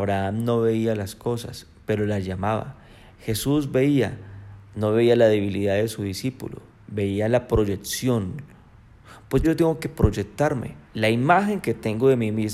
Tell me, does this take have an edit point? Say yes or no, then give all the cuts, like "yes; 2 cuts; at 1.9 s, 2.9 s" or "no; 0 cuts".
yes; 2 cuts; at 9.4 s, 10.8 s